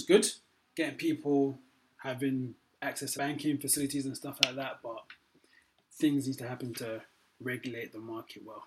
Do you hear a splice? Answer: yes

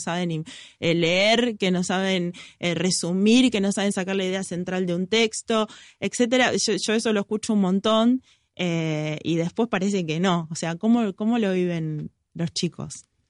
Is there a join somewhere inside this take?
no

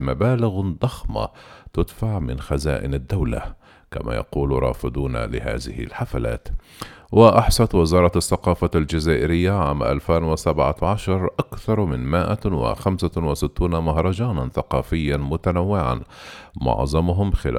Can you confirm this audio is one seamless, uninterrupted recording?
yes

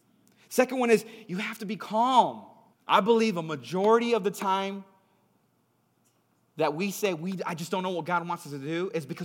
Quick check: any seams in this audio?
yes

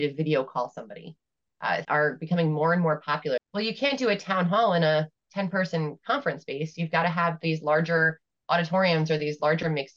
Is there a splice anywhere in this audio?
yes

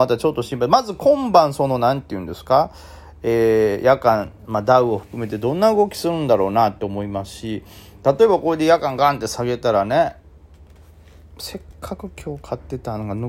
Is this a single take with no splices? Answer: yes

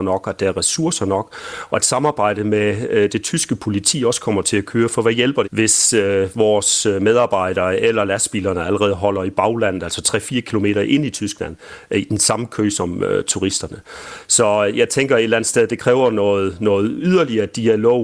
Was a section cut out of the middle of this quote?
yes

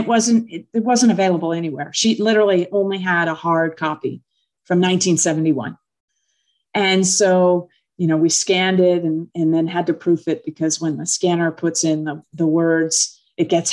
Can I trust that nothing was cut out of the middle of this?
yes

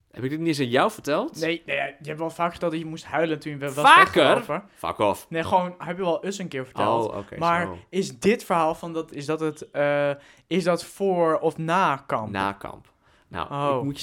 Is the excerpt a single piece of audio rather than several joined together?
no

